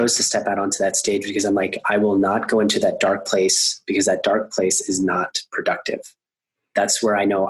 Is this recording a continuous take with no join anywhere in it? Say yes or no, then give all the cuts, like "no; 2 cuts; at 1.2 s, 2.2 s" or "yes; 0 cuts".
yes; 0 cuts